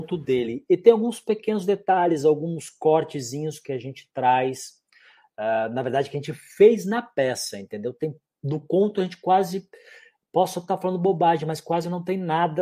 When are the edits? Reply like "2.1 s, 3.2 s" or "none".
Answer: none